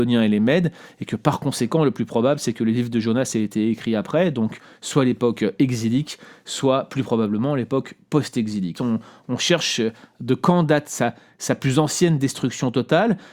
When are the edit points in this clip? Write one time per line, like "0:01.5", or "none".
0:08.7